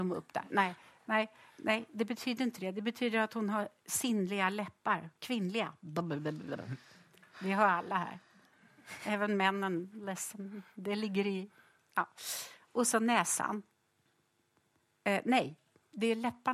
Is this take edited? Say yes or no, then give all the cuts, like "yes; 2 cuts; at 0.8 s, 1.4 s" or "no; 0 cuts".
no; 0 cuts